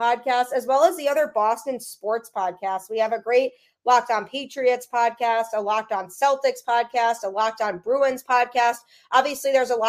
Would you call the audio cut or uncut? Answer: uncut